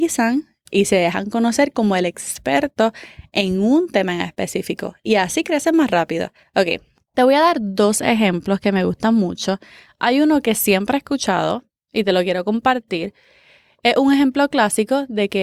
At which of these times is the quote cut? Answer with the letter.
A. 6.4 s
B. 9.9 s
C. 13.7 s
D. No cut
D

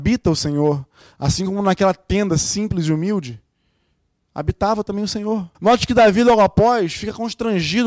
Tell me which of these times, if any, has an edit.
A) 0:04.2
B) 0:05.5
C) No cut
B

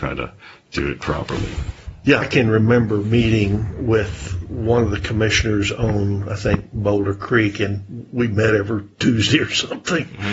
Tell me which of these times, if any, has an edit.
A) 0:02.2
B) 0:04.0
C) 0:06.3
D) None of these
A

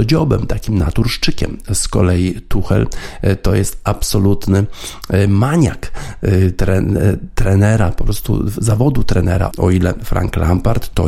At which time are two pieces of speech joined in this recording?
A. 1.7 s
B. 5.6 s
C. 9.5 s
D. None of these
C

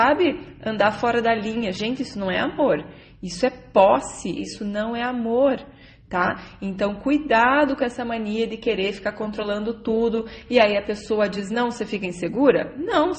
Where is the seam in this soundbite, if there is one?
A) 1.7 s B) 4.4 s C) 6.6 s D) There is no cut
B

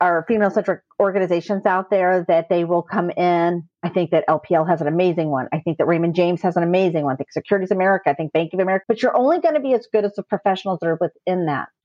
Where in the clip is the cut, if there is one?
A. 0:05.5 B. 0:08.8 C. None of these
B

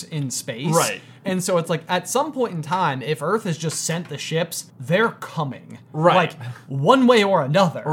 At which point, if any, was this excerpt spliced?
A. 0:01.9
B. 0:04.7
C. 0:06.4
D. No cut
B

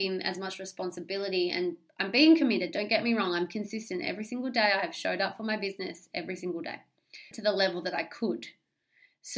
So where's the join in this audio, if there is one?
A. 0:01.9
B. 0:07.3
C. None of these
B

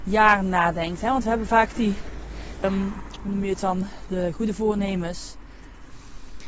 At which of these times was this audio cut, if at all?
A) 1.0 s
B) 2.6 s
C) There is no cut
B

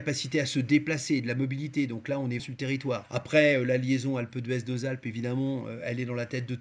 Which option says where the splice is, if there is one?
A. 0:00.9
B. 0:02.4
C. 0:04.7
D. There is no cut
B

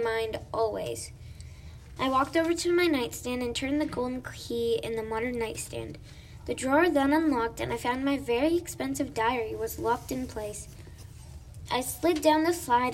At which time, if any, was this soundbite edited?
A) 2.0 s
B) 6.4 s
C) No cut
A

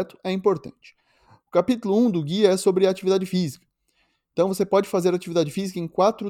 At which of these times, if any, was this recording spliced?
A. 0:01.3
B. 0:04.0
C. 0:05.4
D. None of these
D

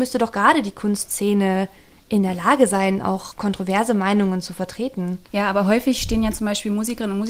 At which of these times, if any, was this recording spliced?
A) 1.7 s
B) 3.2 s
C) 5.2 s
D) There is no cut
C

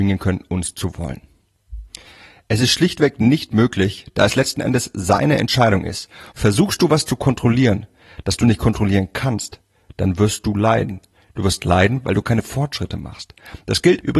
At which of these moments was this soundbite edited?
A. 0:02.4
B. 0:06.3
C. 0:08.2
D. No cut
B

